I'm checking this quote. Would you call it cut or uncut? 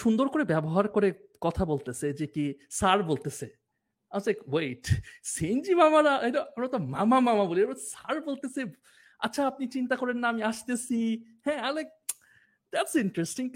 uncut